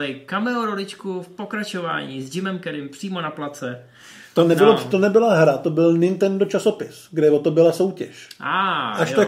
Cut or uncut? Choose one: uncut